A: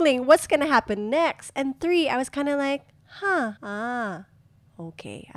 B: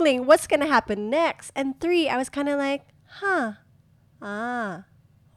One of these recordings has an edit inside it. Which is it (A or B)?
A